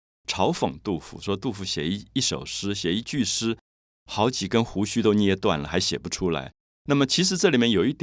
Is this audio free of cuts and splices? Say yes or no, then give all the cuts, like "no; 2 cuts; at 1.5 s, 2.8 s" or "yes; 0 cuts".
yes; 0 cuts